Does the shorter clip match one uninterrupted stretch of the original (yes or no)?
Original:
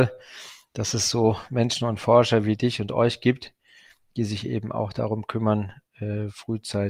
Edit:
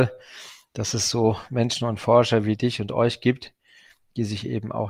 yes